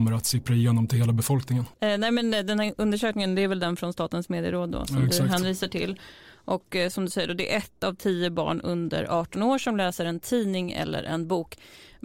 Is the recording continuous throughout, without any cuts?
yes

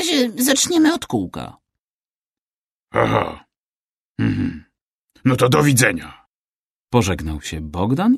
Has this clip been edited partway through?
no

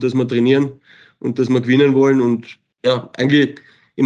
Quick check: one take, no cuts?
yes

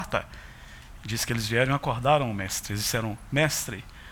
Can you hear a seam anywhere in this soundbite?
yes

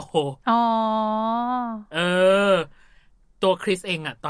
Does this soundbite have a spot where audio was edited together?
no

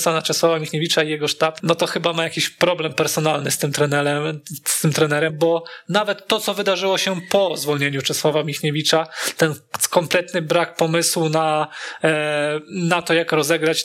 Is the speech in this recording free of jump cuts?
no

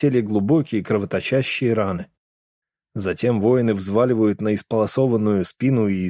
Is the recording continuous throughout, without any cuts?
yes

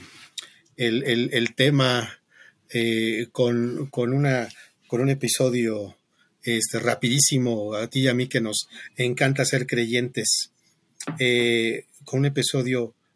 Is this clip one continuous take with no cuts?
yes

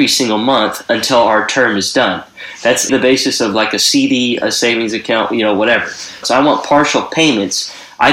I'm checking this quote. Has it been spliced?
yes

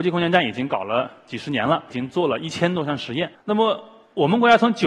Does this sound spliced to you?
yes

